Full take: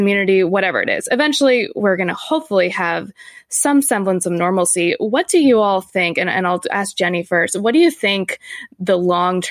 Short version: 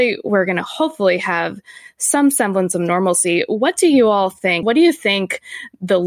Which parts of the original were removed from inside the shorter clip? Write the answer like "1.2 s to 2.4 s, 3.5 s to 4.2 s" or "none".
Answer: 6.1 s to 7.6 s